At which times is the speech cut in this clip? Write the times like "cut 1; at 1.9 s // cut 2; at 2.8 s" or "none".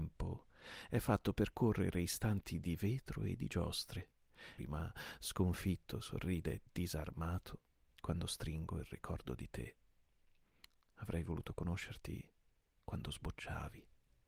cut 1; at 4.6 s